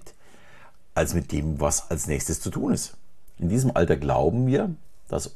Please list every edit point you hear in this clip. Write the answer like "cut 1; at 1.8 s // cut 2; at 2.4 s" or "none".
cut 1; at 3.3 s

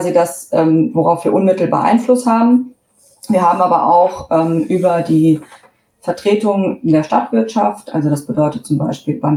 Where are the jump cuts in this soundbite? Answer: none

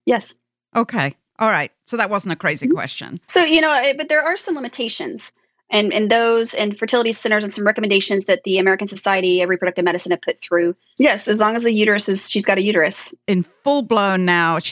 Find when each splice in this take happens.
cut 1; at 11.0 s // cut 2; at 13.3 s

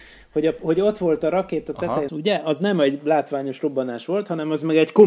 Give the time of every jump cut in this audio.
cut 1; at 2.1 s

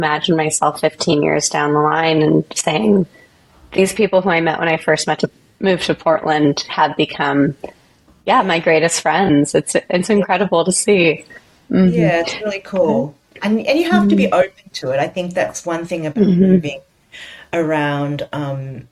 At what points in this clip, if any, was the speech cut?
none

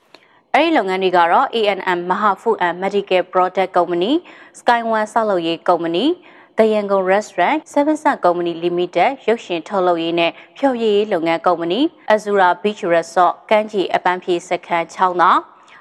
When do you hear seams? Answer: cut 1; at 7.6 s // cut 2; at 12.1 s

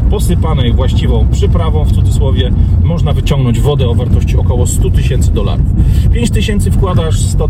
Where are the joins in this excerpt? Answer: none

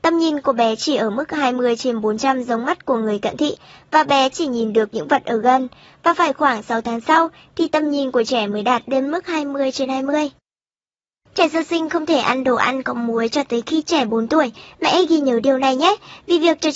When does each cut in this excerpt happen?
none

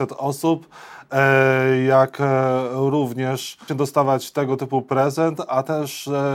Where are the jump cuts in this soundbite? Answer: cut 1; at 3.7 s

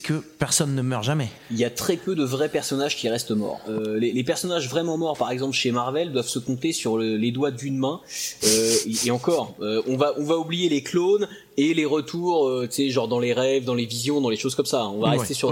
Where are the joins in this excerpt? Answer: none

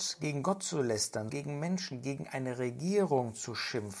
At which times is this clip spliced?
cut 1; at 1.3 s

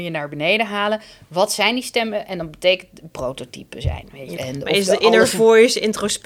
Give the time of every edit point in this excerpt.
cut 1; at 3.1 s // cut 2; at 4.3 s

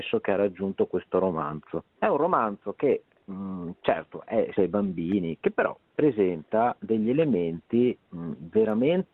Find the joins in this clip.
cut 1; at 1.9 s // cut 2; at 4.6 s

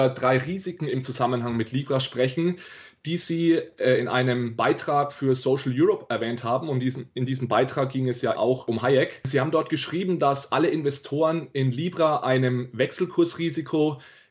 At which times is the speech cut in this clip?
cut 1; at 8.4 s

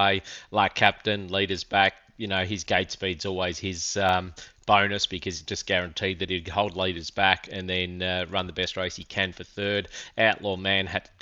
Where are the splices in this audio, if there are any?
none

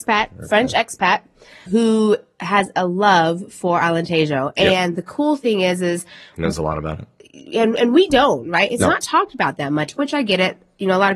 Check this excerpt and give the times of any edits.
cut 1; at 1.7 s

